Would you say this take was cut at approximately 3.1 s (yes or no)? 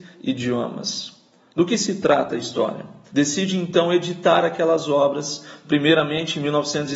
yes